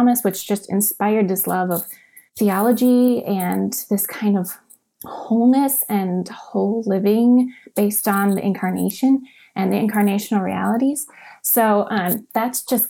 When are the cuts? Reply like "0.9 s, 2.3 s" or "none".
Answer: 2.3 s